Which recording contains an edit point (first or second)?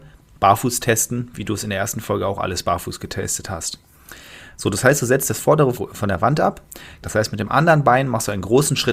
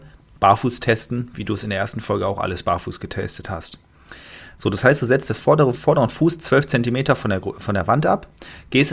first